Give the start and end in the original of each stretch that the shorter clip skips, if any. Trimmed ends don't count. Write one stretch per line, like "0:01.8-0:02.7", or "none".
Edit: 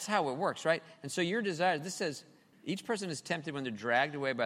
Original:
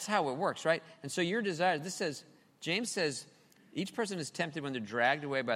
0:02.5-0:03.6